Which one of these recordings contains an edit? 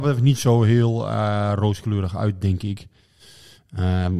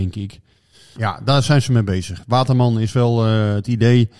second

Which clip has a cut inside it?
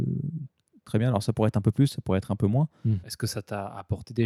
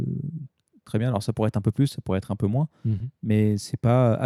first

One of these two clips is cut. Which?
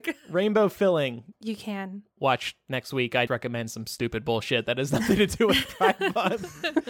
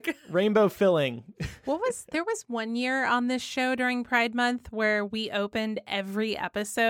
first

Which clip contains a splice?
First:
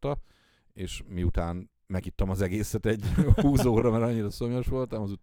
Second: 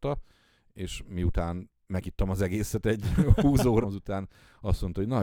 second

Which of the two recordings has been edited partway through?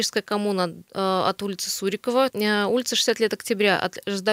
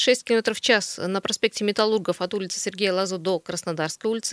first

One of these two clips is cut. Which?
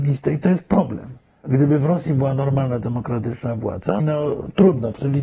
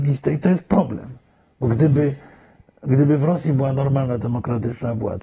first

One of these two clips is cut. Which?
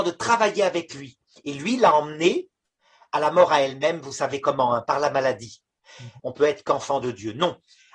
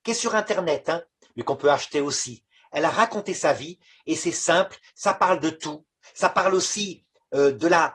first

